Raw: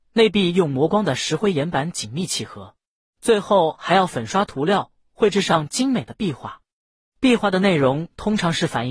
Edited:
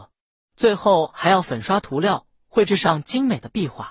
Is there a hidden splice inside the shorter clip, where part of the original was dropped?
no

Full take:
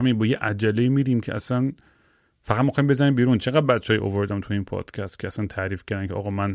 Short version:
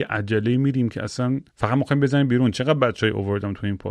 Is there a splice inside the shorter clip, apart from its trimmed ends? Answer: yes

